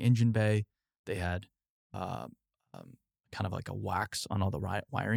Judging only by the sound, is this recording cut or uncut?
uncut